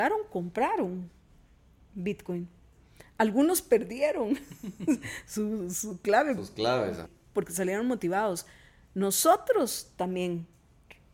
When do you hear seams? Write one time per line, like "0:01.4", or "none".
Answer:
0:07.0